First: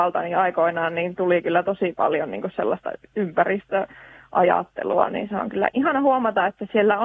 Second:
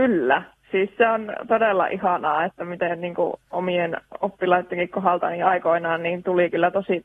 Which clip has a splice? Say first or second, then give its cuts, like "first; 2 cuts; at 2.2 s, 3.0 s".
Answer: first; 1 cut; at 5.7 s